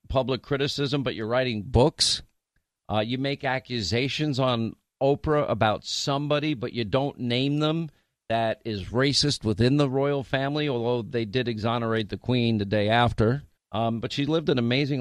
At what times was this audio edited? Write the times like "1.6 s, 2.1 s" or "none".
13.6 s